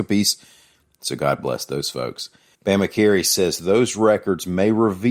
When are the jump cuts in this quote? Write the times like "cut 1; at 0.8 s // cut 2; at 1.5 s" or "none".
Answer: cut 1; at 2.5 s